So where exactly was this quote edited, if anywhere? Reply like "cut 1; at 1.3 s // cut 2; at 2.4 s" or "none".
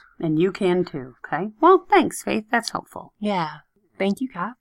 cut 1; at 1.2 s